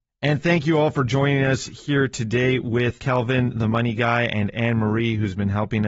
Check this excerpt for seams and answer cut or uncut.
cut